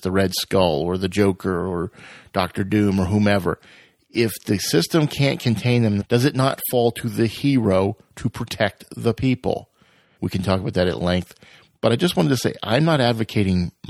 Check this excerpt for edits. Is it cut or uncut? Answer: cut